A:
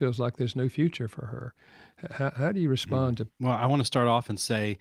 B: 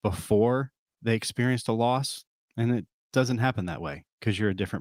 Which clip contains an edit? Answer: A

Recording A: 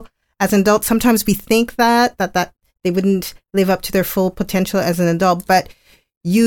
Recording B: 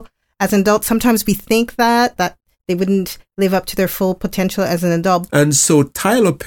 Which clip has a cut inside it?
B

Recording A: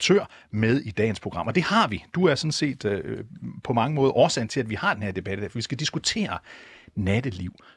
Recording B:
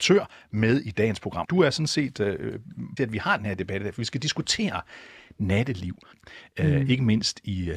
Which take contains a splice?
B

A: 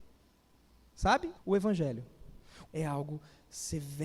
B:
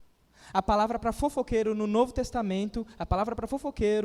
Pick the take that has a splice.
A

